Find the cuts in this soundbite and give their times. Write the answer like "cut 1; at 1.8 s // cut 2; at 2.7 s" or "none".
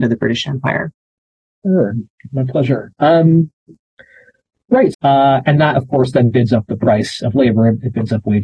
cut 1; at 4.9 s